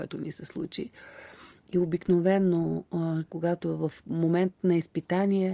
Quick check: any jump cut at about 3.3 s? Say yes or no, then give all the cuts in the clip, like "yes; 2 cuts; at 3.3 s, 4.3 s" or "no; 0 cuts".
yes; 1 cut; at 3.3 s